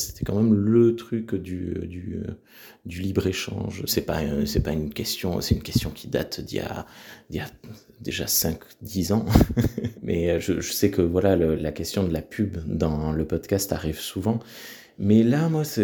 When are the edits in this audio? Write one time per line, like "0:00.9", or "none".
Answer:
0:03.9
0:09.9
0:11.5